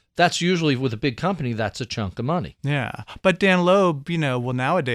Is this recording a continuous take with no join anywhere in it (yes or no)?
yes